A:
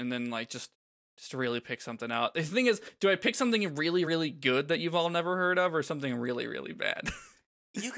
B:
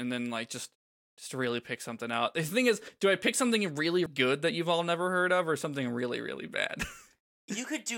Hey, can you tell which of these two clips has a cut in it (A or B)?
B